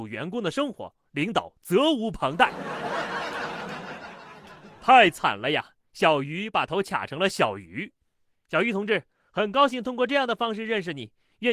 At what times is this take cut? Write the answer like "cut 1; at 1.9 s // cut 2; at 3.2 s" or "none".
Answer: none